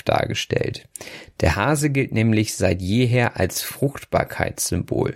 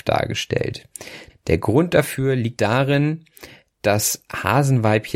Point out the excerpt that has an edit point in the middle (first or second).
second